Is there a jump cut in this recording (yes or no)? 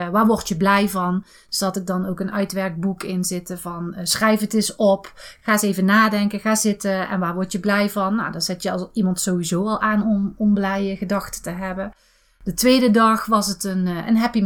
no